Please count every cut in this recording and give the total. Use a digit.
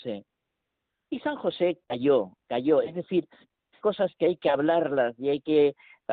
2